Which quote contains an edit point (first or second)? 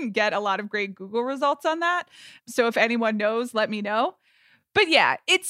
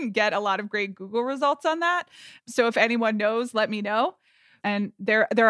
second